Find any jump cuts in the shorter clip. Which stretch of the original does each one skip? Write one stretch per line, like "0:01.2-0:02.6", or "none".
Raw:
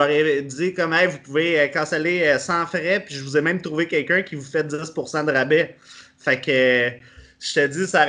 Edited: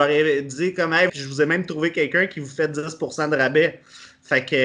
0:01.1-0:03.1